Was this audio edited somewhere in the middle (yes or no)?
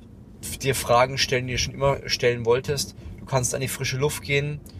no